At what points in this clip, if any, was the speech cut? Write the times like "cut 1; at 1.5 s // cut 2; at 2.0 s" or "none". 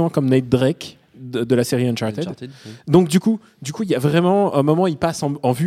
none